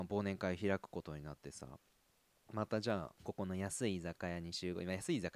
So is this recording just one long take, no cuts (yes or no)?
no